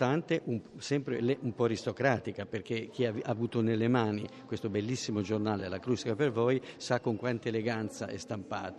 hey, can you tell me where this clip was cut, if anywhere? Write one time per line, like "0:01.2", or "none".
none